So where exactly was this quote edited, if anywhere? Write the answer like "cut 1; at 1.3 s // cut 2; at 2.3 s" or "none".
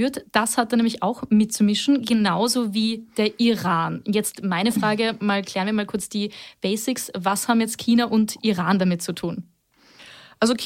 none

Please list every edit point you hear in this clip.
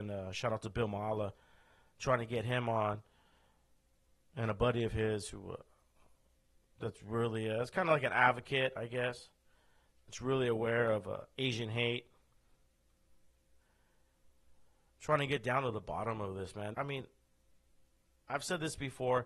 cut 1; at 16.7 s

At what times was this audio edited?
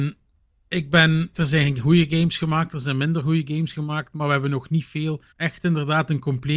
cut 1; at 1.3 s // cut 2; at 5.3 s

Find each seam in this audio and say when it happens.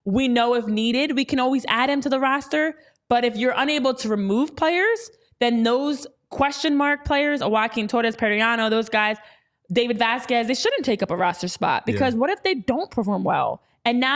none

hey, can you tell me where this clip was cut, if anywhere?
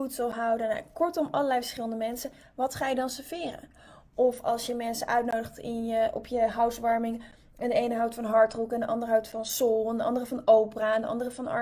none

